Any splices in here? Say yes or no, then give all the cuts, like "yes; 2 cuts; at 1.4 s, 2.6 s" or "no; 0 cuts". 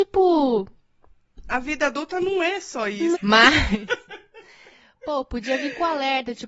yes; 1 cut; at 3.1 s